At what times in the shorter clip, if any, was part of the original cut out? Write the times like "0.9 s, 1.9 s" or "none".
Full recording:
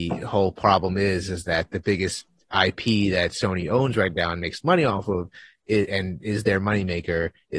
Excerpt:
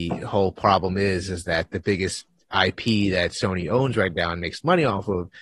none